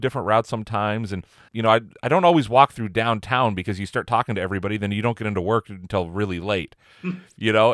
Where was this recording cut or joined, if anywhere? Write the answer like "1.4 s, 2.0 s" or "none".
1.5 s